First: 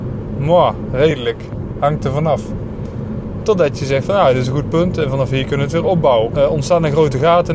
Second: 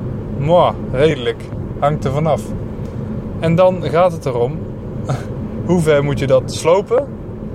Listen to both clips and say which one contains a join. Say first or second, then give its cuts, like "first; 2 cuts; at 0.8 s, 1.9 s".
first; 2 cuts; at 3.4 s, 6.3 s